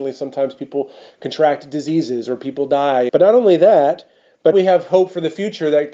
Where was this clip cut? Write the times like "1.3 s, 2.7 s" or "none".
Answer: 3.1 s, 4.5 s